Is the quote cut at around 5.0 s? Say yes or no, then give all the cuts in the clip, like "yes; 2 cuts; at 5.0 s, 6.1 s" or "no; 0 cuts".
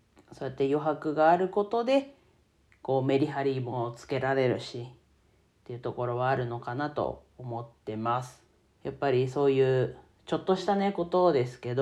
no; 1 cut; at 8.8 s